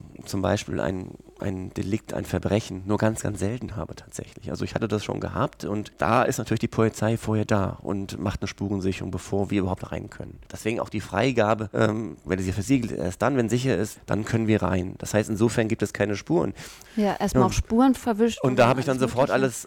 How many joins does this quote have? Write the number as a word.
three